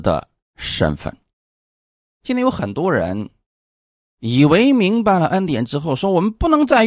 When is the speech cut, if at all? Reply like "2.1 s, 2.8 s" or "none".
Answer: none